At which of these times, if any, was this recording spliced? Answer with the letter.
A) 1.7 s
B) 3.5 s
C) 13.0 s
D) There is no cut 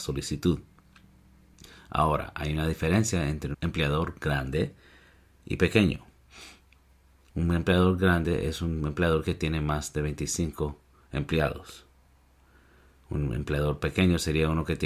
B